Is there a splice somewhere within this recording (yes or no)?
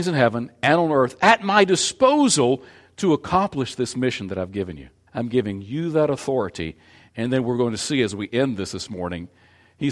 yes